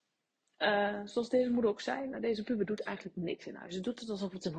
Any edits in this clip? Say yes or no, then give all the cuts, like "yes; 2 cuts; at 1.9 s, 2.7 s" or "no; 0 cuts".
no; 0 cuts